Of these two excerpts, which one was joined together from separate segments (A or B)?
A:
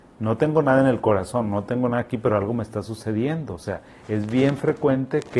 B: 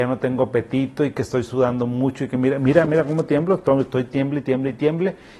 B